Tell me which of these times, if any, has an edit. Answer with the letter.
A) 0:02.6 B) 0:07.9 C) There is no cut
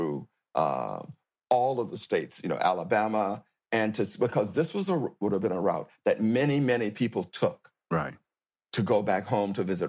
C